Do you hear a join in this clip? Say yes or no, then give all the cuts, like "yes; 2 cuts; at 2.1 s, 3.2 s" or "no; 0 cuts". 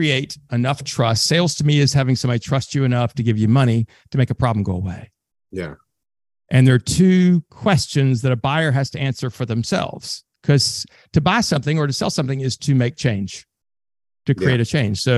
no; 0 cuts